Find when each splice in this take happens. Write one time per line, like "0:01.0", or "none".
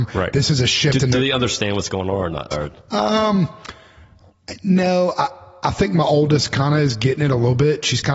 none